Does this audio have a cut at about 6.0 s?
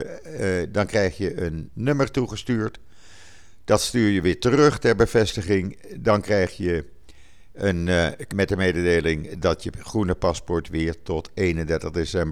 no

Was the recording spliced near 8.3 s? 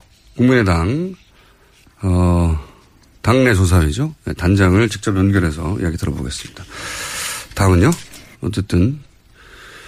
yes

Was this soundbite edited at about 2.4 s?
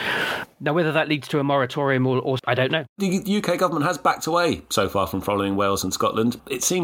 yes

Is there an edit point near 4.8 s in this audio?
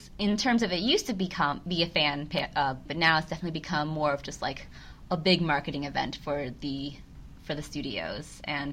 no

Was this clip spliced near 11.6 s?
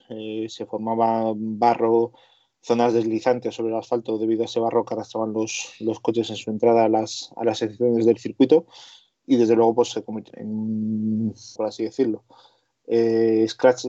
yes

